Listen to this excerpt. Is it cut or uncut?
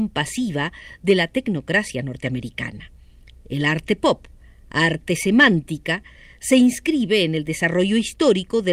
uncut